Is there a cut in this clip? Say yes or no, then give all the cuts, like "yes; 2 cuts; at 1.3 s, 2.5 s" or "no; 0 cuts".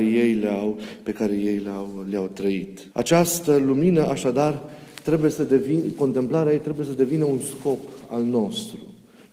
yes; 1 cut; at 2.9 s